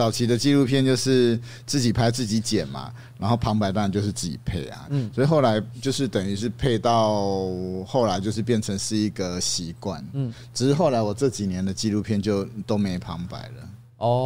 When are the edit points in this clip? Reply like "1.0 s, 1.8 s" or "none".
4.9 s